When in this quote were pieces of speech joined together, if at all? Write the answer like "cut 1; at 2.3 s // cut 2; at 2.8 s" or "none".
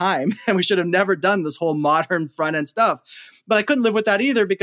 none